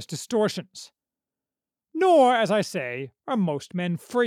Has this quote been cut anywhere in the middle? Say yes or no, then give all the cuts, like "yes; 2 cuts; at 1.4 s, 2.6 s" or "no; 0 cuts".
no; 0 cuts